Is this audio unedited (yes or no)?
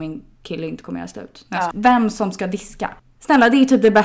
no